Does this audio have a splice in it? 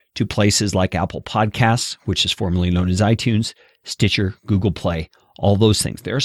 no; 0 cuts

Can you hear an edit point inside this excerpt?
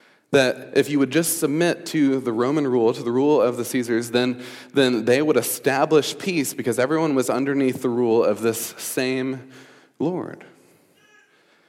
no; 0 cuts

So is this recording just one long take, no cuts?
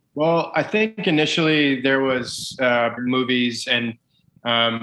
no; 1 cut; at 3.0 s

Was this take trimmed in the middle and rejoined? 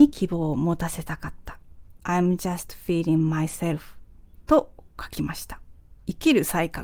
yes; 1 cut; at 2.0 s

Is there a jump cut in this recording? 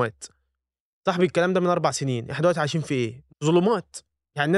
yes; 1 cut; at 3.3 s

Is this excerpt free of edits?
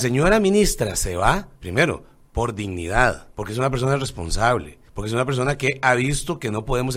no; 3 cuts; at 1.6 s, 3.3 s, 4.9 s

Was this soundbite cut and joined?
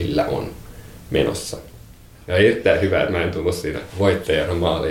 yes; 1 cut; at 2.1 s

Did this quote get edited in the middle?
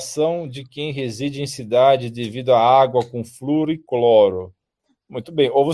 no; 0 cuts

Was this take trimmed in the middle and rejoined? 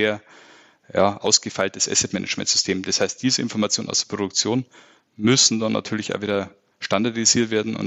no; 0 cuts

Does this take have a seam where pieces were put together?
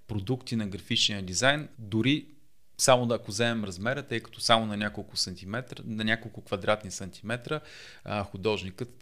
yes; 1 cut; at 1.7 s

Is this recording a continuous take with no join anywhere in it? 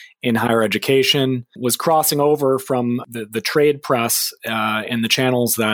yes; 0 cuts

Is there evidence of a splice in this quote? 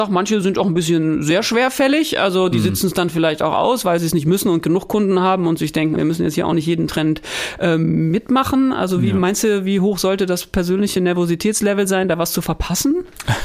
yes; 1 cut; at 6.0 s

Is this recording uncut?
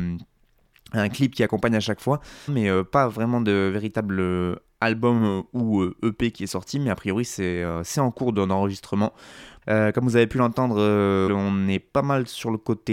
no; 3 cuts; at 2.5 s, 9.6 s, 11.3 s

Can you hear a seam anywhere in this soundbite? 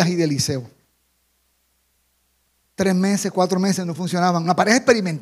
yes; 1 cut; at 2.6 s

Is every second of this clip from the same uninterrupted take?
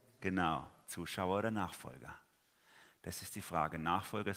yes; 0 cuts

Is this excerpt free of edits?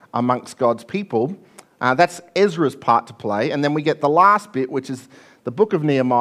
yes; 0 cuts

